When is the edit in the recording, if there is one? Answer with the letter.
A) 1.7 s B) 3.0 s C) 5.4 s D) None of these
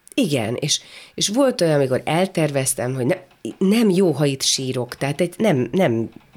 C